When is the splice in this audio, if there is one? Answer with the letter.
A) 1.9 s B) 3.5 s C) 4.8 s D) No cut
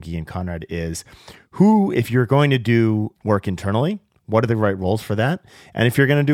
D